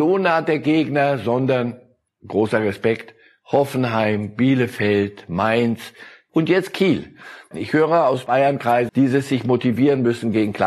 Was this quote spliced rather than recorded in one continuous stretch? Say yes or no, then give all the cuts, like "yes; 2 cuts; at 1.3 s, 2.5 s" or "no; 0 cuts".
yes; 2 cuts; at 7.5 s, 8.9 s